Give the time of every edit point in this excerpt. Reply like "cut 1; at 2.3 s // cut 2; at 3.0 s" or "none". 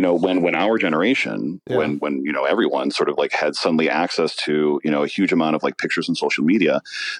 none